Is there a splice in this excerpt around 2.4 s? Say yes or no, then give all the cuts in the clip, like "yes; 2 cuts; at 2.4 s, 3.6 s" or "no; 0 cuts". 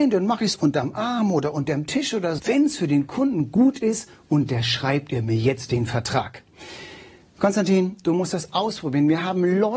yes; 1 cut; at 2.4 s